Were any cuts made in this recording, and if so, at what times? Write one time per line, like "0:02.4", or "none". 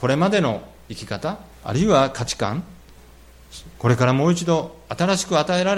0:01.5
0:03.8